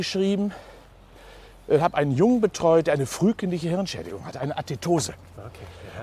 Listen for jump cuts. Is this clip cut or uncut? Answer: uncut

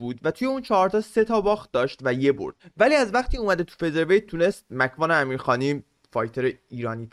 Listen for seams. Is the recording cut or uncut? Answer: cut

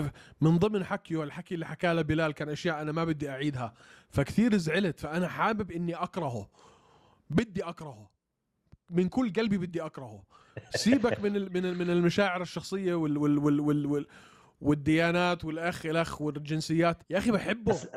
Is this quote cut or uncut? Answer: cut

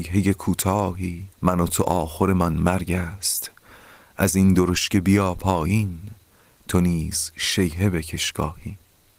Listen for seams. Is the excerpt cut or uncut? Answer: cut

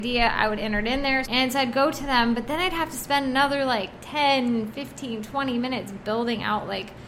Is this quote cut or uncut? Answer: cut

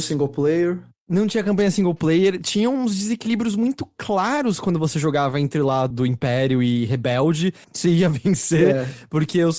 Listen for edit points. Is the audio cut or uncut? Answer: cut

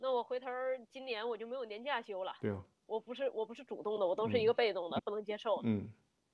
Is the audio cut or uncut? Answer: cut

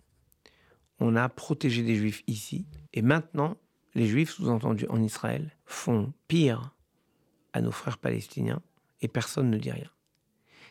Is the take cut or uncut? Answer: cut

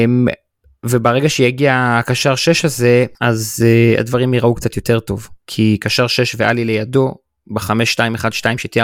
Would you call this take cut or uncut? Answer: cut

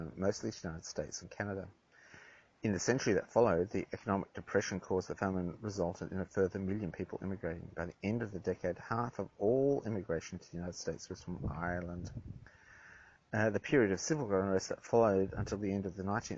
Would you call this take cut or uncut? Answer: uncut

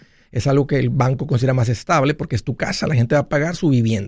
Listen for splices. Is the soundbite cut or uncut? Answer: uncut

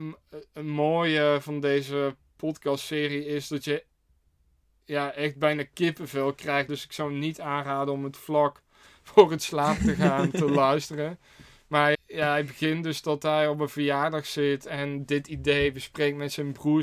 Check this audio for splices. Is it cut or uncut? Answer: cut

